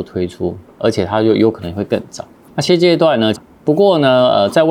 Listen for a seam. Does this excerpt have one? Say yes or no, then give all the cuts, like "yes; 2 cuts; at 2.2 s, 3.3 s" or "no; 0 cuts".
yes; 1 cut; at 3.3 s